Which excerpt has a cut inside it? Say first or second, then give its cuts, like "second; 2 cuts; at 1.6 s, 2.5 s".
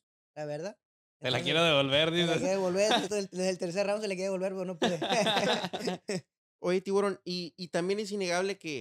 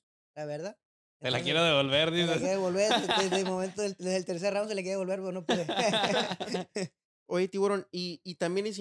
first; 1 cut; at 3.1 s